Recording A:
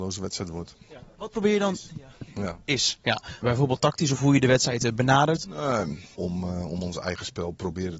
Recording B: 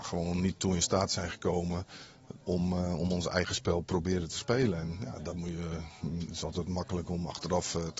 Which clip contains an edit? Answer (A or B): A